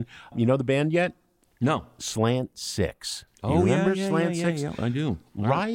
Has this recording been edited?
no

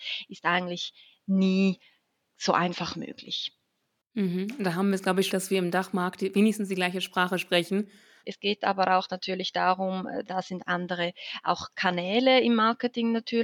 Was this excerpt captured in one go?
no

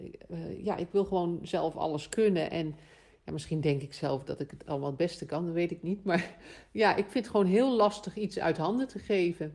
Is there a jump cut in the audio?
no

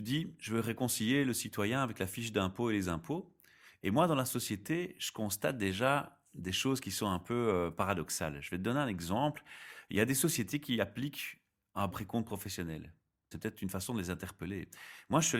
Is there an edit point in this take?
yes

